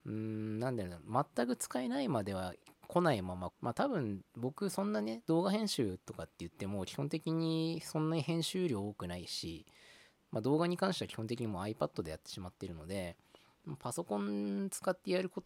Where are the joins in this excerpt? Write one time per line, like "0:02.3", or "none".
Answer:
0:03.5